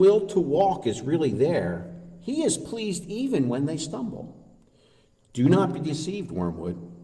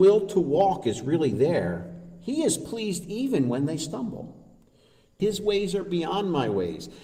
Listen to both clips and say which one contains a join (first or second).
second